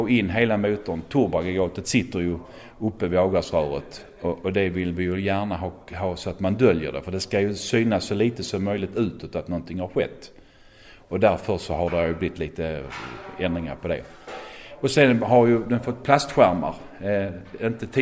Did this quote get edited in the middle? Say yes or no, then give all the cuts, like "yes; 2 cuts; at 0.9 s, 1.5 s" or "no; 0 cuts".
no; 0 cuts